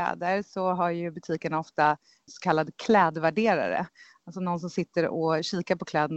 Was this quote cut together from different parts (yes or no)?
no